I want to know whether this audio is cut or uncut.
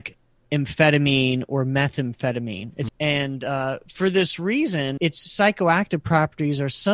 cut